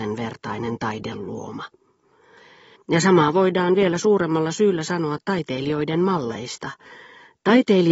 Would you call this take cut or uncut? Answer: cut